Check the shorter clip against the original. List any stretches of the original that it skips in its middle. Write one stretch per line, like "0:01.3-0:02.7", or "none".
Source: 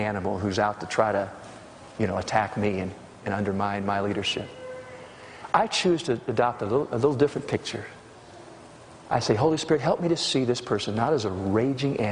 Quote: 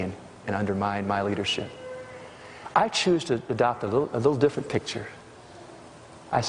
none